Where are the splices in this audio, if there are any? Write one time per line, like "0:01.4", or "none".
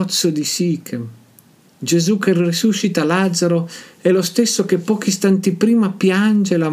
none

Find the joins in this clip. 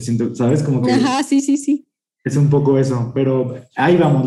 none

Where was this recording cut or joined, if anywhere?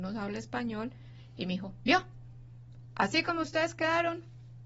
none

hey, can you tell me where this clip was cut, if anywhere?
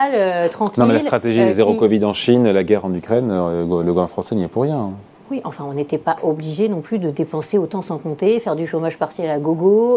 none

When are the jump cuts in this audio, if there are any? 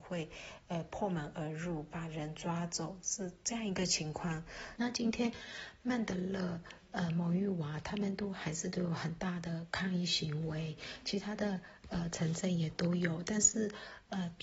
0:04.8

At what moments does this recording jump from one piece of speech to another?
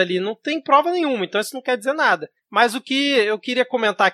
none

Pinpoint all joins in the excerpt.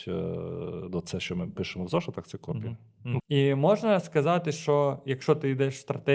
0:03.2

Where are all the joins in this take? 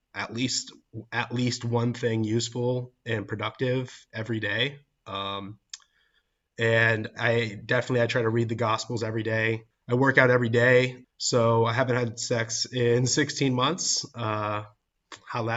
0:09.7
0:11.0

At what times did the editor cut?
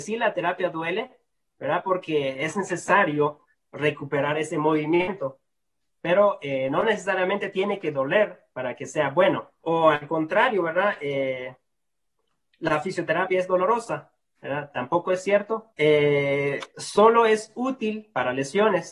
0:09.6
0:15.7

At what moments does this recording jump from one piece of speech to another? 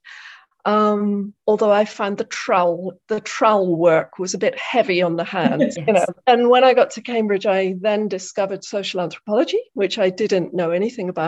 0:05.7

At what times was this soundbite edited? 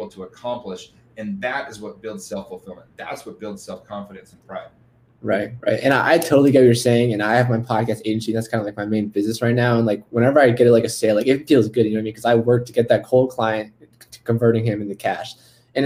none

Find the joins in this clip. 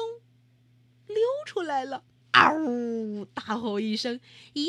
0:02.2

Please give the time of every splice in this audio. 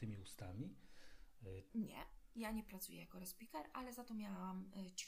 0:01.7

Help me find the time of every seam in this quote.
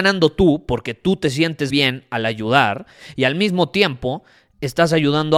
0:01.7

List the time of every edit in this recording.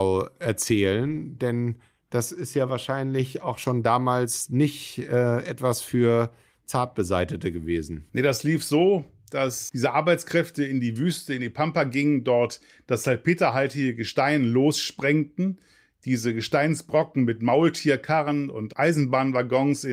0:08.1

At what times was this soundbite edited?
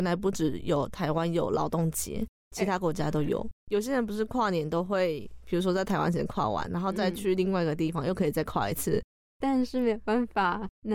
0:03.6
0:09.3

